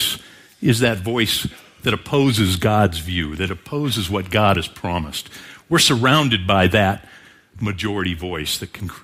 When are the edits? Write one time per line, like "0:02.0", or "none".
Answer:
none